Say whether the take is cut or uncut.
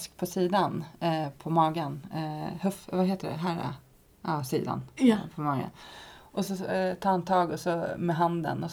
uncut